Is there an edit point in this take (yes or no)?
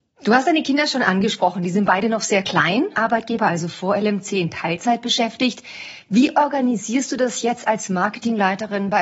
yes